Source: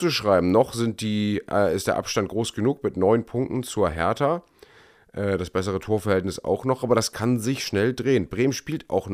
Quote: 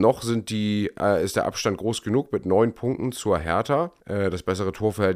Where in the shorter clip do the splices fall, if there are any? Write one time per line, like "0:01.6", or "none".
0:04.0